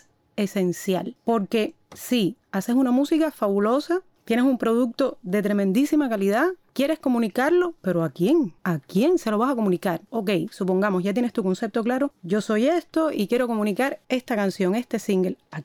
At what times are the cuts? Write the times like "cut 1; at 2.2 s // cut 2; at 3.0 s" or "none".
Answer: cut 1; at 14.0 s